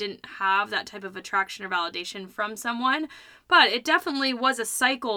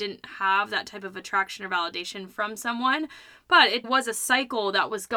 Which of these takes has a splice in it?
second; 1 cut; at 3.8 s

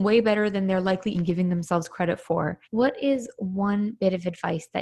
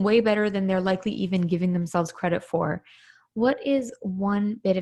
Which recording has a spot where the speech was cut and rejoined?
first; 2 cuts; at 1.1 s, 2.6 s

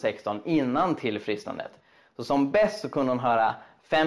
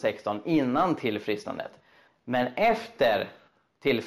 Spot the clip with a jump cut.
second; 1 cut; at 2.1 s

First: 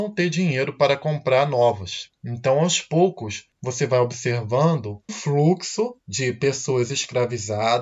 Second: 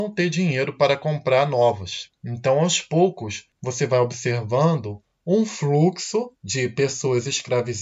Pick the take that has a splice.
first; 1 cut; at 5.1 s

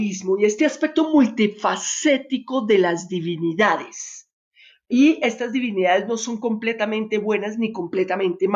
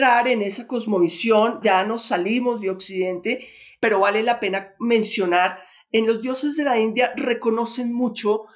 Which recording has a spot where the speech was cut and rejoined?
second; 1 cut; at 1.6 s

